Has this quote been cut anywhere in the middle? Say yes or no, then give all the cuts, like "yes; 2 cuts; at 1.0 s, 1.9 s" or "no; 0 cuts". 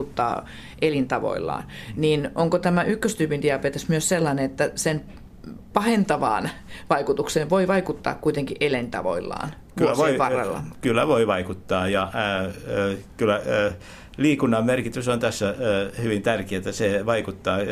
no; 0 cuts